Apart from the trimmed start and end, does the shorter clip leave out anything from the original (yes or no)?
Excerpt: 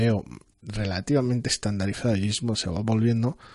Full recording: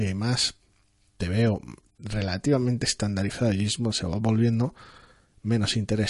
no